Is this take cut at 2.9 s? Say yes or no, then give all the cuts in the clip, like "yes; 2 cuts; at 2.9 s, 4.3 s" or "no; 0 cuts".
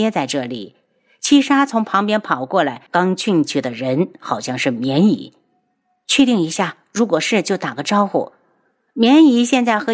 yes; 1 cut; at 2.9 s